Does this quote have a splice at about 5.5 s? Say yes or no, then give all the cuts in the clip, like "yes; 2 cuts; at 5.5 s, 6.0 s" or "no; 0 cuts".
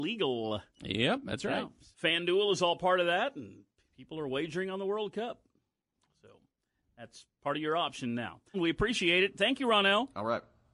no; 2 cuts; at 1.9 s, 8.5 s